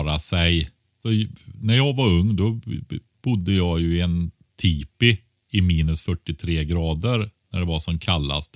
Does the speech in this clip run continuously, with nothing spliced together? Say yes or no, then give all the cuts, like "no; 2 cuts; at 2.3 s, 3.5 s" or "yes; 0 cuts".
yes; 0 cuts